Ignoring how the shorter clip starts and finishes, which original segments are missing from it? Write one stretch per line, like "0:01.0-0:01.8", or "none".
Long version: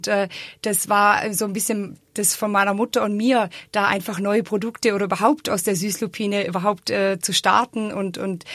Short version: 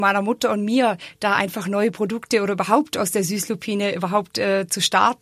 none